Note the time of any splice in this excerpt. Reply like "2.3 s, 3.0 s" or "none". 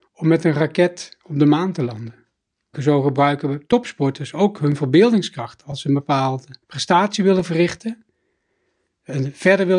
2.7 s, 6.6 s